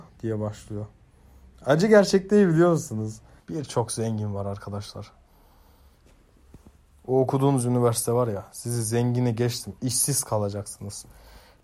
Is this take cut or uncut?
cut